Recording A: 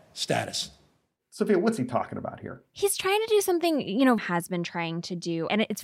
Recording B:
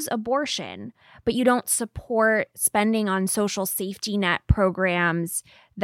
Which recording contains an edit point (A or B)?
A